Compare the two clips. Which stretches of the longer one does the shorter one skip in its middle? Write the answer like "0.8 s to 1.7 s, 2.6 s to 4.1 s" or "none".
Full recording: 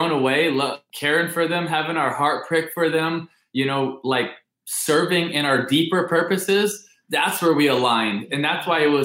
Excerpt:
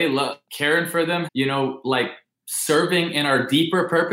1.7 s to 3.4 s